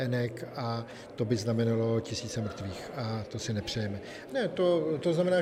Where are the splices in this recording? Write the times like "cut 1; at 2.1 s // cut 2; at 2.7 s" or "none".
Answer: cut 1; at 4.3 s